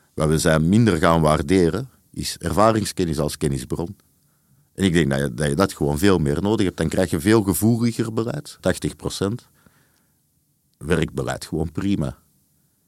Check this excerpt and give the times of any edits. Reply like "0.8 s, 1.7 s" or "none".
8.6 s